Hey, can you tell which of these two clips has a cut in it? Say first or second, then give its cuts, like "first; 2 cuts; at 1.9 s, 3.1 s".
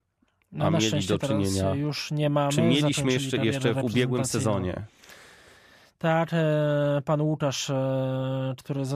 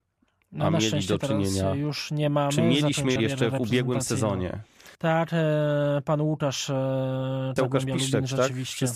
second; 3 cuts; at 3.2 s, 5.0 s, 7.6 s